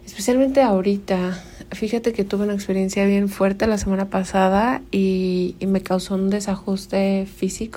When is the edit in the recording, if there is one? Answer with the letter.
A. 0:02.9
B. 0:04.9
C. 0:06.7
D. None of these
D